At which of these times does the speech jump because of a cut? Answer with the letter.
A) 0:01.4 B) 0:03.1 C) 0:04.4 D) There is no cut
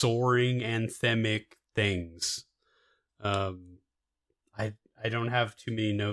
D